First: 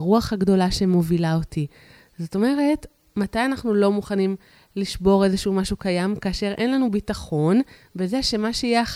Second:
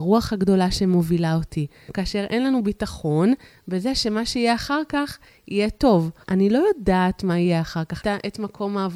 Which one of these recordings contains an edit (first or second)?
second